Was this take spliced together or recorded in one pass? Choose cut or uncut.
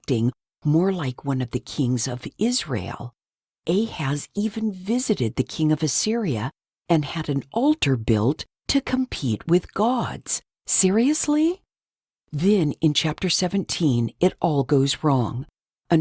uncut